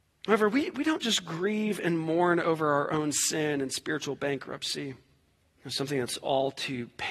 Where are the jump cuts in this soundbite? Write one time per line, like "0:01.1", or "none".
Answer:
0:05.4